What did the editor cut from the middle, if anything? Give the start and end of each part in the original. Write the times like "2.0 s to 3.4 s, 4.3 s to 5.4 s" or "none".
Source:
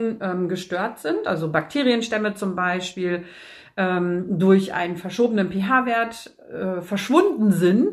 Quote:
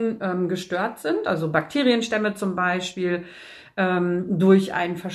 none